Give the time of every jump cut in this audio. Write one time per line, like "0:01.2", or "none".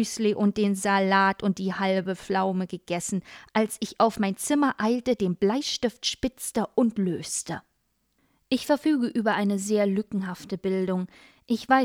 none